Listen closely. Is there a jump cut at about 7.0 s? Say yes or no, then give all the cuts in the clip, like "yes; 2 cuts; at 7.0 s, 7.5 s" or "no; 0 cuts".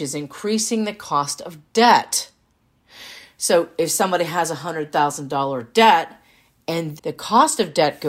yes; 1 cut; at 7.0 s